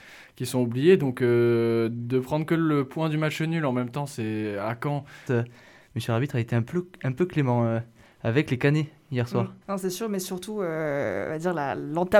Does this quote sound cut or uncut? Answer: cut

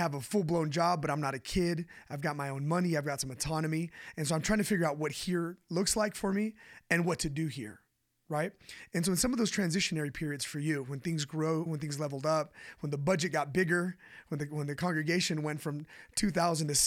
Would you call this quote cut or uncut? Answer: cut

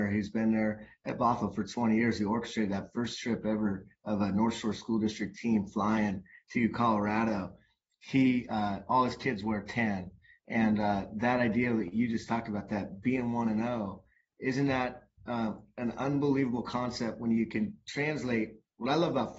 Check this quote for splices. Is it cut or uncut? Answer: uncut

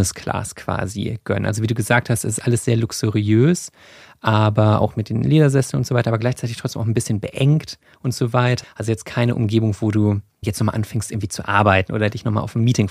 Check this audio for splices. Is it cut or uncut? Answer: cut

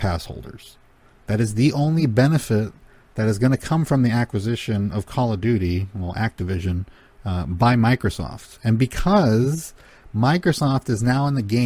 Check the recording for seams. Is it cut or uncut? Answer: uncut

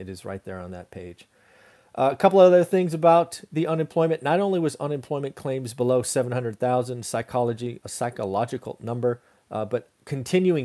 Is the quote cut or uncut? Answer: uncut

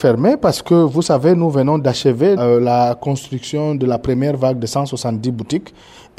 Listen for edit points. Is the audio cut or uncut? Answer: cut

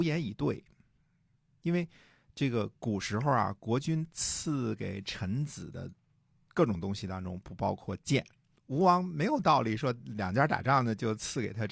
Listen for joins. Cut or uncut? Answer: cut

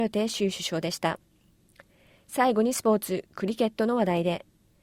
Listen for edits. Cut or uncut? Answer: uncut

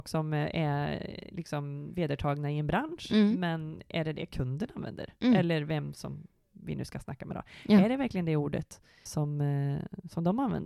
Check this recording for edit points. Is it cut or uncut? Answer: cut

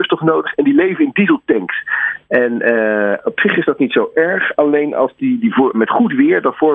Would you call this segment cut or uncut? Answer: cut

